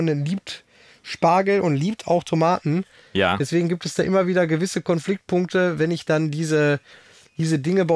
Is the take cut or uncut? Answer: uncut